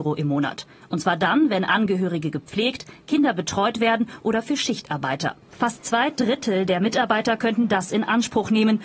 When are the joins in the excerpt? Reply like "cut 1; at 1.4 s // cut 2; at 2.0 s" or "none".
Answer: cut 1; at 5.4 s